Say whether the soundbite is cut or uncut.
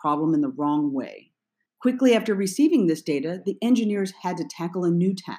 cut